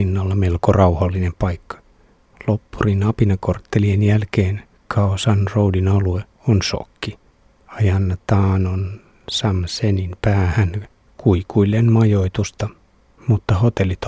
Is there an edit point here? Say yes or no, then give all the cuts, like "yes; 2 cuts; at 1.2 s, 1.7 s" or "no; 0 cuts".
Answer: yes; 1 cut; at 7.6 s